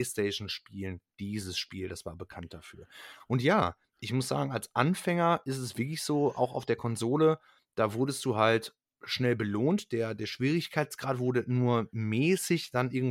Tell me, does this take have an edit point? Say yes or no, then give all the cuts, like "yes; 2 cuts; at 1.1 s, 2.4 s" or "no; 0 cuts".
no; 0 cuts